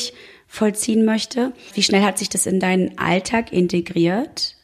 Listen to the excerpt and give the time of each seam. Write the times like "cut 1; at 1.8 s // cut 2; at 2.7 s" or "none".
none